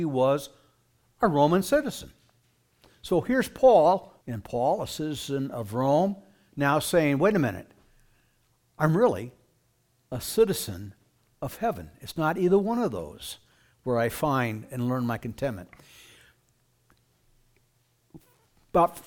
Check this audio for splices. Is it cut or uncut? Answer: cut